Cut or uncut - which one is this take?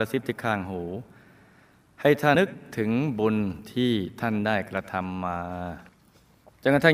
cut